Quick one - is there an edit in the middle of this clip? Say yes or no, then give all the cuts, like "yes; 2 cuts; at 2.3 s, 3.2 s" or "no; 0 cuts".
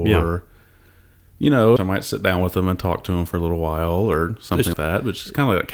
yes; 2 cuts; at 1.8 s, 4.7 s